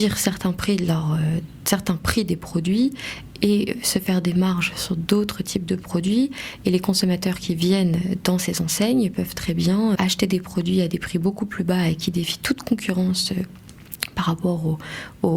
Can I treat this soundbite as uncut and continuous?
no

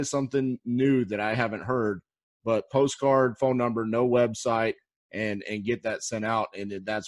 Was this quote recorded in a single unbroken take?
yes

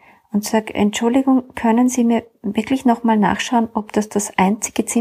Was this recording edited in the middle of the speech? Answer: no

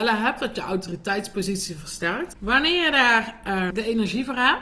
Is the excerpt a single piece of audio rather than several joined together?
no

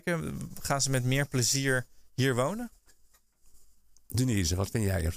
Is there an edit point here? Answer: no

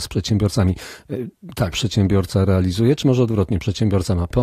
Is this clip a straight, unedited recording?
no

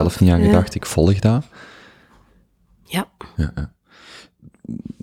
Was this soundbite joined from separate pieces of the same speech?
yes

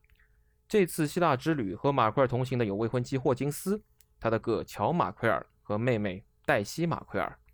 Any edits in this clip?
yes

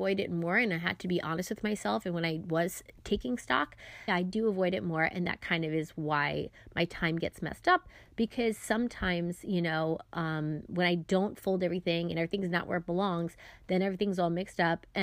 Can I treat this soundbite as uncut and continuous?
no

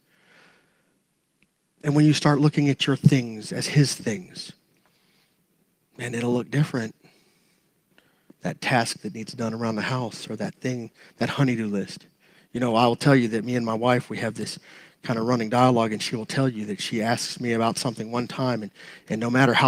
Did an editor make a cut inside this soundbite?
no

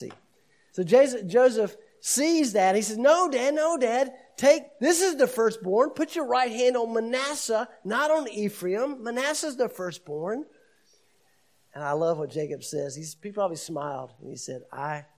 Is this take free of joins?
yes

